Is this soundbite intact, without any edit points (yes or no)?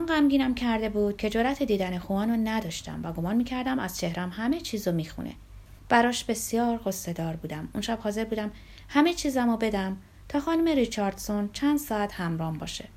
no